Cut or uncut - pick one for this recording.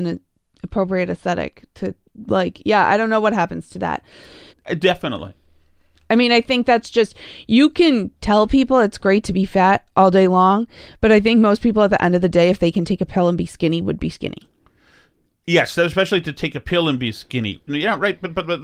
cut